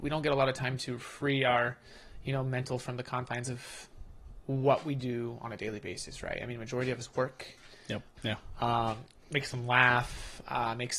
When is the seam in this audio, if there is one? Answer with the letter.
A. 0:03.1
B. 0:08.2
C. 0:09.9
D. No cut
B